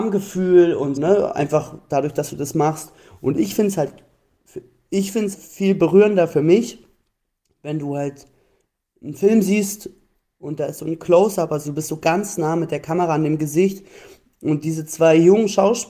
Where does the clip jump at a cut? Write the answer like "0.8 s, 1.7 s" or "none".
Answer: 1.0 s, 5.3 s

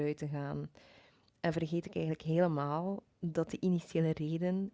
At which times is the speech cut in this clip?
none

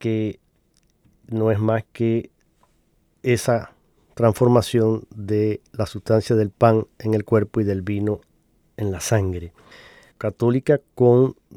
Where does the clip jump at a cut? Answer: 10.1 s

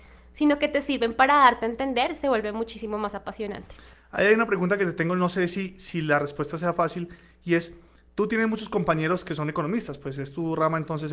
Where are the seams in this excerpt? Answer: none

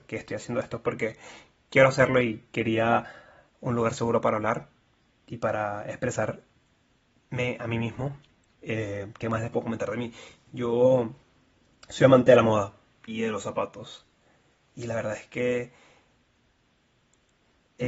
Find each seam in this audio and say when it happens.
none

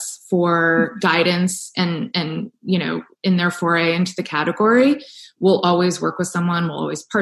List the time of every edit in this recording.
none

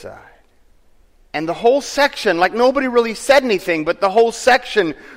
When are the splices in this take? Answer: 1.2 s

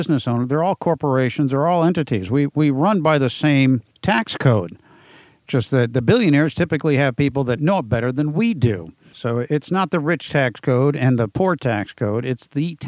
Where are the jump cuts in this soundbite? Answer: none

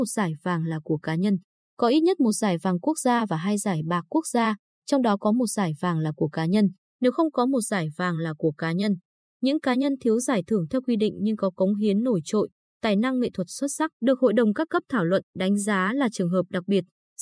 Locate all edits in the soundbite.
6.9 s

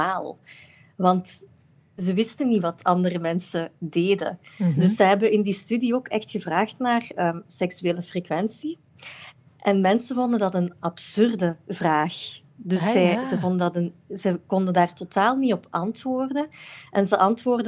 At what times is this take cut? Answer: none

